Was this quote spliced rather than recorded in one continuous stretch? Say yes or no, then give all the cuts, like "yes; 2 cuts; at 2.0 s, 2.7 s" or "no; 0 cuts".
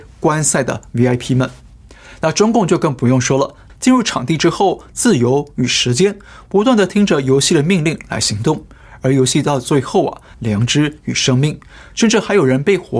yes; 3 cuts; at 3.7 s, 4.9 s, 10.3 s